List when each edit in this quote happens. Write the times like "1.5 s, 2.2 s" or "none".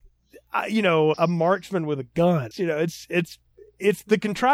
1.1 s, 2.5 s